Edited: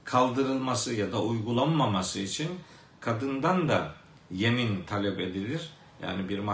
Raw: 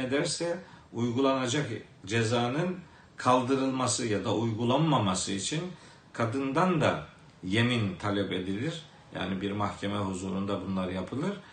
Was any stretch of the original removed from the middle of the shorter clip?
no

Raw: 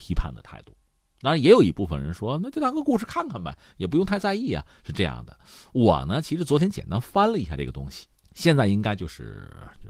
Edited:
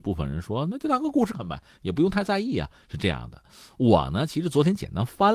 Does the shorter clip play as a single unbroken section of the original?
no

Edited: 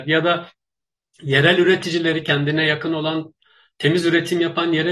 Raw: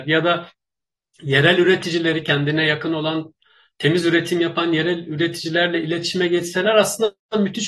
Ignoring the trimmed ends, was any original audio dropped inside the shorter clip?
no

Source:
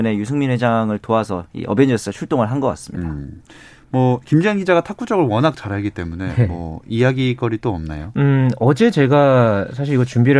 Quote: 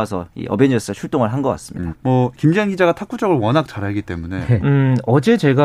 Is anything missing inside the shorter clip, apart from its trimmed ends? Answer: yes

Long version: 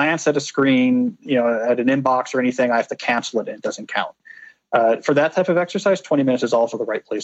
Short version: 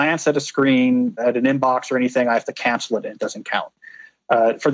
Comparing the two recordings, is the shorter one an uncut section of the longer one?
no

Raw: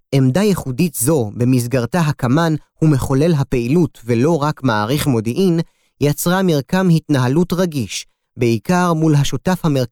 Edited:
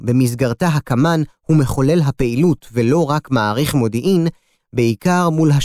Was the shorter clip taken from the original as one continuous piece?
no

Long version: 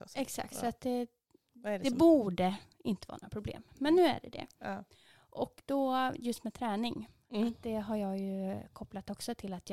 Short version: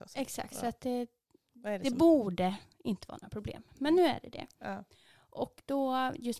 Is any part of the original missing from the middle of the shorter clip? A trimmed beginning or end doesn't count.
no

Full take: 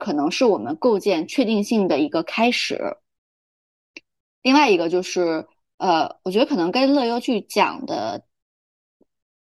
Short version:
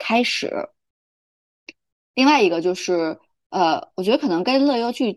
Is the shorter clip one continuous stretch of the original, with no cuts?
yes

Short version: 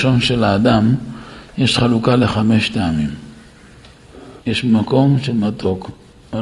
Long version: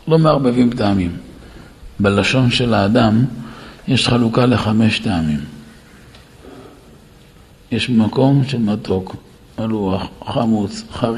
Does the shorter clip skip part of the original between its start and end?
yes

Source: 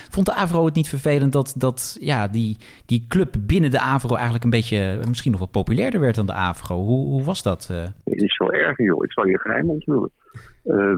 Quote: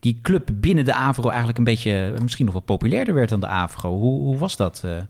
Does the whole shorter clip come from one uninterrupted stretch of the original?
yes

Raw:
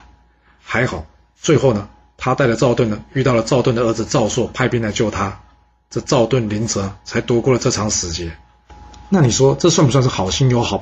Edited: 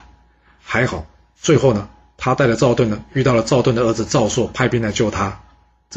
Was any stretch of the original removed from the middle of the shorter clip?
no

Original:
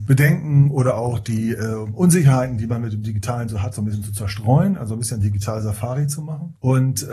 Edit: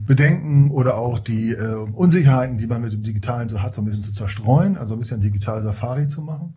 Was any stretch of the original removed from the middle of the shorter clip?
no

